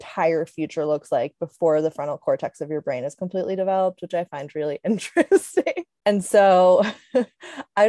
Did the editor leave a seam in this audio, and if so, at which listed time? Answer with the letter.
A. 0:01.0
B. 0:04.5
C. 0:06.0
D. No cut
C